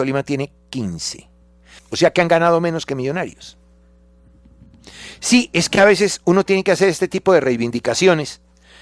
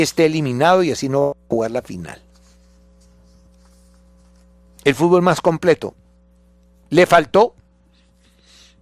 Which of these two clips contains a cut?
first; 1 cut; at 1.8 s

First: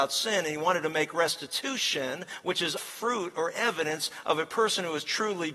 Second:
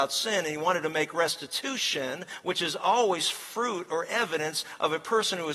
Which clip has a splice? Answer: first; 1 cut; at 2.8 s

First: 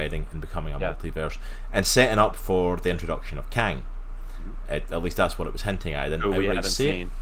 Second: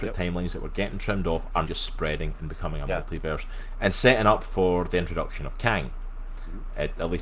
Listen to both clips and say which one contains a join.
second; 1 cut; at 1.6 s

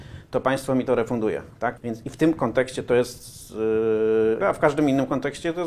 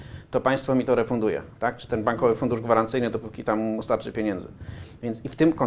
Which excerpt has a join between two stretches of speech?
first; 2 cuts; at 1.8 s, 4.4 s

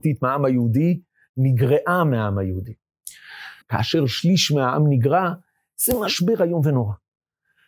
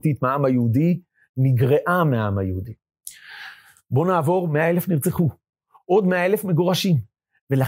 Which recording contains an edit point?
first; 1 cut; at 3.6 s

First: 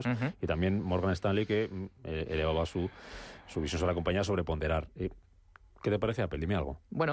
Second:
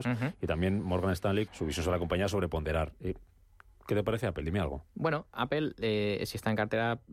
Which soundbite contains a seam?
second; 1 cut; at 1.5 s

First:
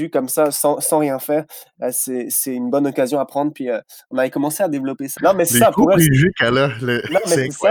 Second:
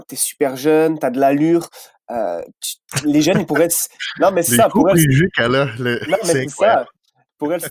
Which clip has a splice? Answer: first; 1 cut; at 5.2 s

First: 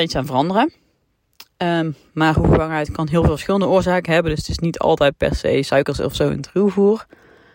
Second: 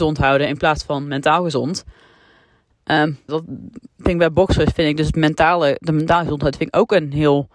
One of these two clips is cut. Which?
second; 1 cut; at 3.3 s

